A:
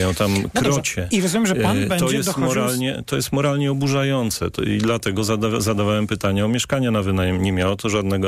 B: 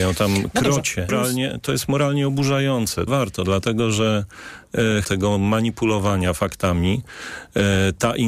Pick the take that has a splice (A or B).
B